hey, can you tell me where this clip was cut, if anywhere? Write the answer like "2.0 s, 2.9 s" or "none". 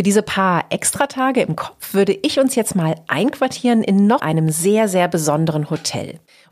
4.2 s